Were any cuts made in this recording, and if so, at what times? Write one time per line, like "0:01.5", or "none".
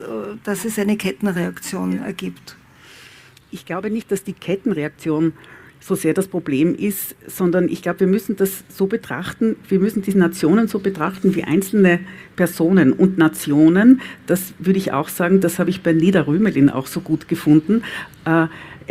none